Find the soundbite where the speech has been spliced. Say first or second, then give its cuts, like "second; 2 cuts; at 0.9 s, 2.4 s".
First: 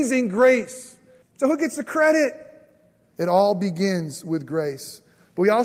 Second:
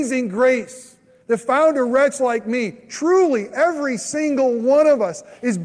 first; 2 cuts; at 1.2 s, 3.1 s